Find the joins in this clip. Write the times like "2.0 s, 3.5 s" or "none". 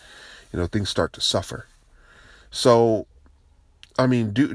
none